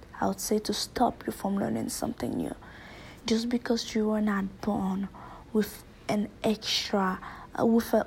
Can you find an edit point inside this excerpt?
no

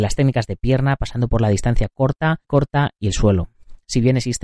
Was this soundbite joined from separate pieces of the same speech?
yes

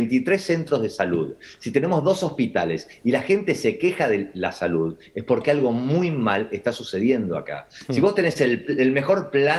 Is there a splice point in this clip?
no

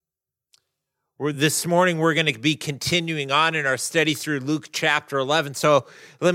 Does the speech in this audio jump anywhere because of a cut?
no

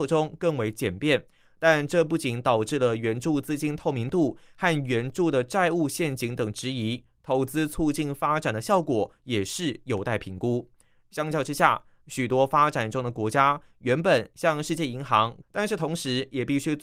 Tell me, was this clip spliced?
yes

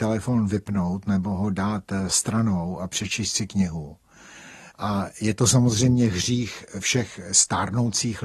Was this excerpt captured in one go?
no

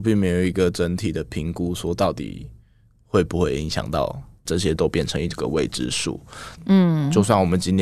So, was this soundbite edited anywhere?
yes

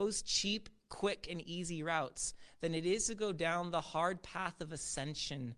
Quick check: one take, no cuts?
yes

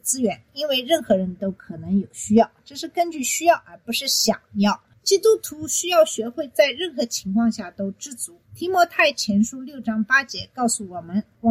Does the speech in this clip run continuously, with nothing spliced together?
yes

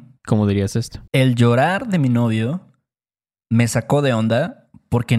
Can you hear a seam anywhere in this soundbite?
yes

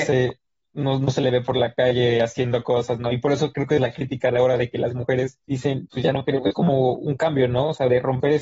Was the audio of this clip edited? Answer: yes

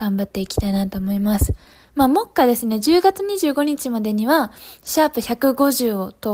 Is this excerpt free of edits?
yes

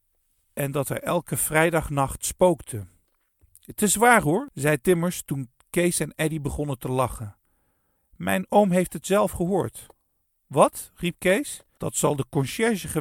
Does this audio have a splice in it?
yes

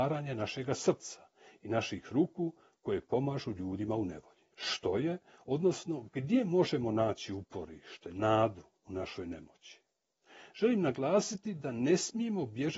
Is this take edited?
yes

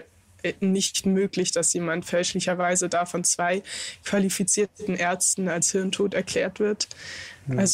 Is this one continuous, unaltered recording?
yes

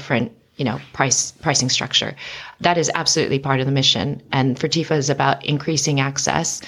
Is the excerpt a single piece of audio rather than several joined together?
yes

